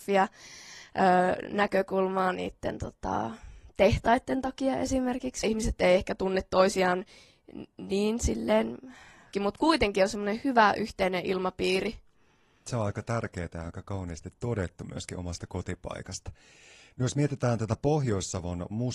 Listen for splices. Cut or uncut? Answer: cut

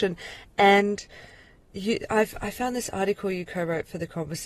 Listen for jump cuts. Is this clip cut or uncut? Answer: uncut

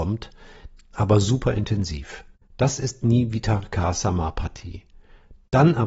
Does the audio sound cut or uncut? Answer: cut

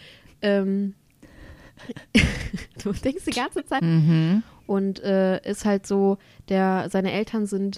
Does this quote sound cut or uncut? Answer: cut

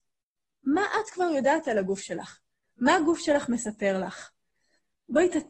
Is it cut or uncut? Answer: uncut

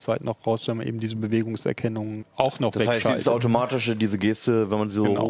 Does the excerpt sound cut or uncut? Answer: cut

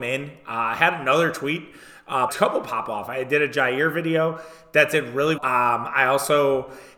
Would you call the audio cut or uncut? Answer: cut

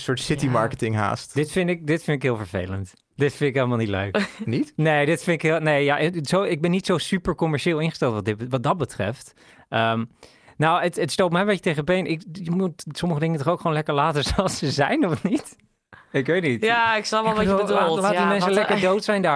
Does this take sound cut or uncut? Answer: uncut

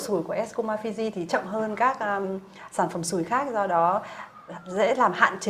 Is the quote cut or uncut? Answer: uncut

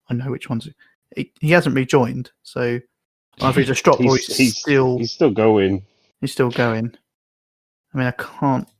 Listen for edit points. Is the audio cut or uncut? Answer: uncut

